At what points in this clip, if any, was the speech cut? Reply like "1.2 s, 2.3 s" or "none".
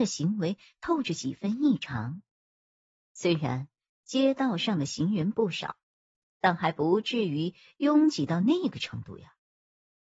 none

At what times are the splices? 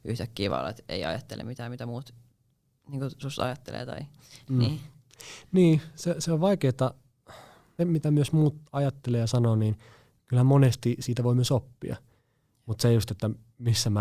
7.8 s

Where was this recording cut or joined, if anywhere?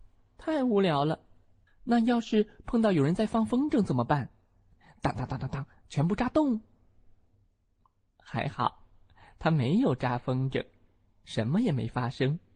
1.7 s

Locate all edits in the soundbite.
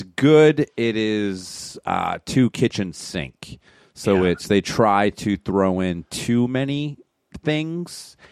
none

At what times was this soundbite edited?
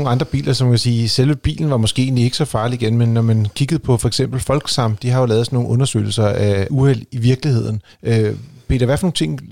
6.7 s, 7.9 s

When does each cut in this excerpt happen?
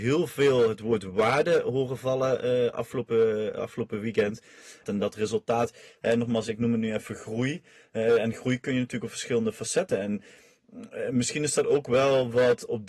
4.8 s

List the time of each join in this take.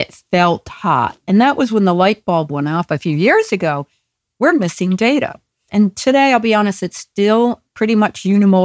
5.7 s

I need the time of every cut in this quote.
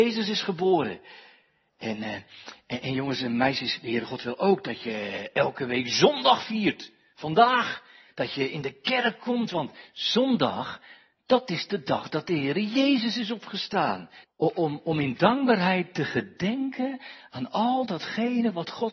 14.2 s

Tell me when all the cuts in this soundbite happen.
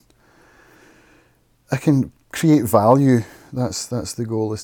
none

